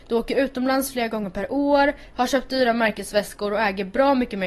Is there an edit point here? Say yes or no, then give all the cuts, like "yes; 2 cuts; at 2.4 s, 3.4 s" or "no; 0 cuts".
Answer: no; 0 cuts